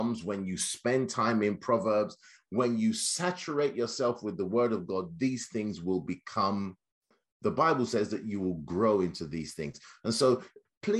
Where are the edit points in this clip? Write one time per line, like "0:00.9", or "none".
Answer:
none

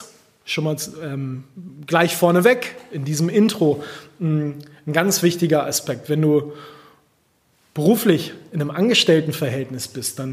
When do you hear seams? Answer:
none

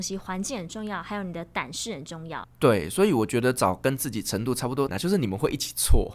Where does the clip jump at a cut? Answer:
0:02.4
0:04.9

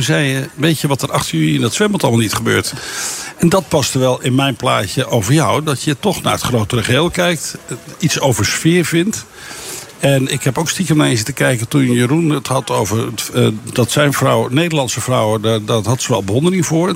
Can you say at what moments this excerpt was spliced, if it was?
none

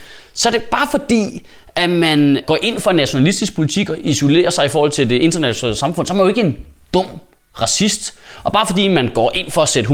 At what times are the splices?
0:02.4

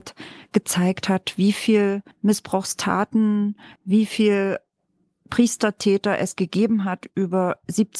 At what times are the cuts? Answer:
0:02.1
0:03.8

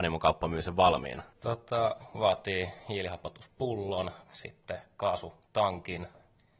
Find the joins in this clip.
0:01.3
0:04.3

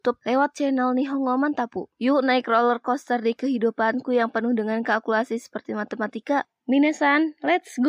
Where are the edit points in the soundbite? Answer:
0:06.6

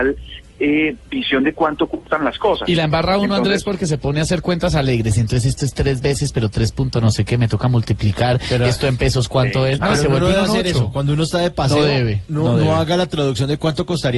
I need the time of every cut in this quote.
none

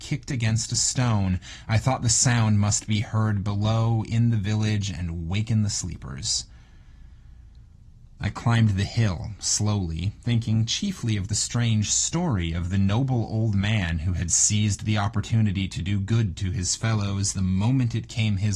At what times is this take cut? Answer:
none

